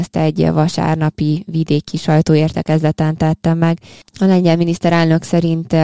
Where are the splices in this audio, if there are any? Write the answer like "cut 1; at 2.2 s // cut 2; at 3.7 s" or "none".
cut 1; at 4.0 s